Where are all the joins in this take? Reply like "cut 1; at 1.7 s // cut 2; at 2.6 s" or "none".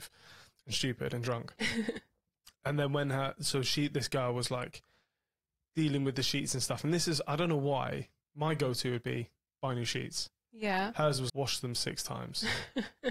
cut 1; at 2.5 s // cut 2; at 11.3 s